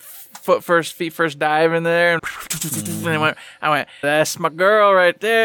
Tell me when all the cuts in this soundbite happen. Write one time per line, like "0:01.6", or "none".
0:02.2
0:04.0